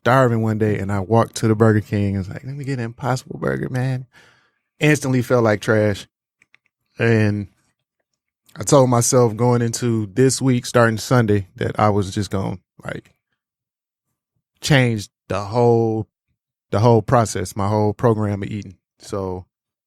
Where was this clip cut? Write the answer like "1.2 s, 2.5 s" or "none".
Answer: none